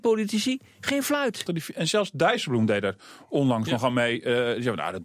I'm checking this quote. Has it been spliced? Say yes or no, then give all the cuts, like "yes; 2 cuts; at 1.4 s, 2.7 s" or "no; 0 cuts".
yes; 1 cut; at 1.5 s